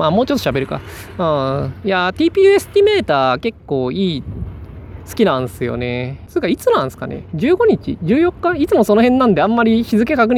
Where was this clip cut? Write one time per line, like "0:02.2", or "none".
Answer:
0:06.3